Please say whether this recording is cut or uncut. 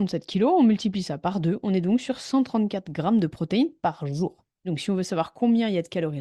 cut